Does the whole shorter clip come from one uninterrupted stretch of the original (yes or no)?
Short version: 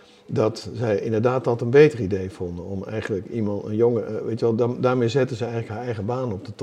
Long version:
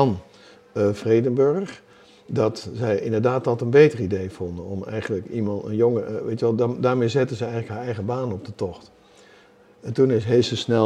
yes